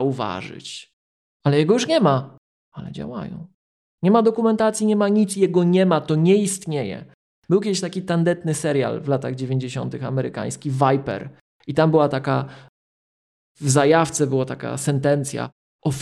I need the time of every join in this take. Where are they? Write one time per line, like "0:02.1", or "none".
0:01.3

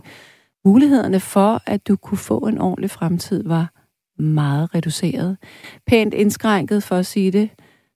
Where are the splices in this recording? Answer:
none

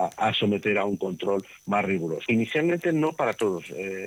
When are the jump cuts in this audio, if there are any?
0:02.3

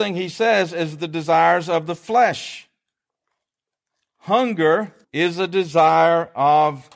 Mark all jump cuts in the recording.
0:05.0

